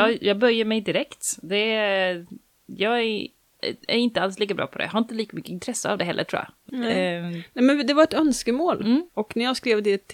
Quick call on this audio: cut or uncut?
cut